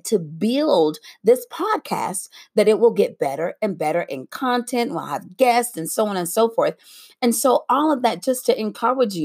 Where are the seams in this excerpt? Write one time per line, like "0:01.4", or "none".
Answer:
none

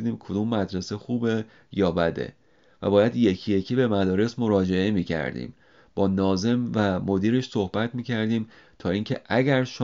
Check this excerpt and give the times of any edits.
none

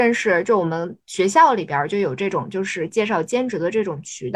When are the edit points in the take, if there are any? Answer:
none

